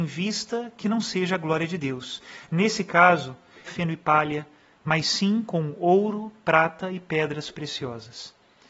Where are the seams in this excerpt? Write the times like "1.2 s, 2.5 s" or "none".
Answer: 3.7 s